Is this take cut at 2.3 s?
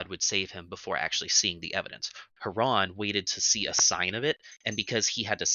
yes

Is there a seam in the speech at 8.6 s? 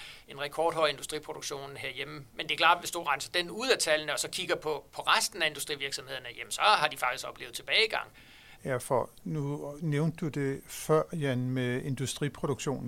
yes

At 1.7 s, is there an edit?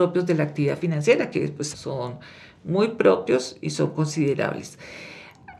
yes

